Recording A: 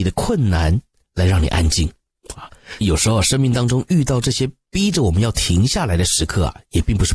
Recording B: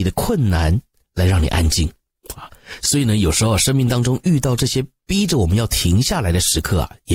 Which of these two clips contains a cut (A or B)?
A